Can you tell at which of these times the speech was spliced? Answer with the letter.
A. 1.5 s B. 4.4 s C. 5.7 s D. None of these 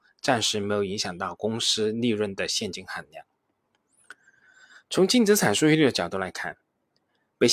D